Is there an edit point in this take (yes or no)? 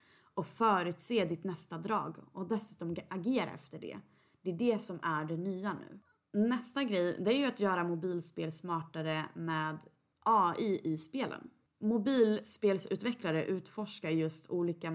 no